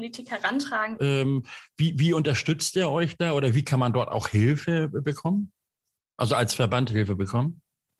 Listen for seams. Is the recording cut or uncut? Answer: cut